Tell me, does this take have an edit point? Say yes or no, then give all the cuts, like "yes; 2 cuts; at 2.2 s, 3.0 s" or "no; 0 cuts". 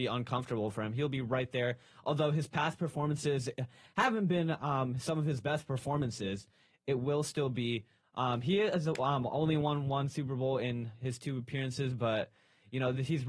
no; 0 cuts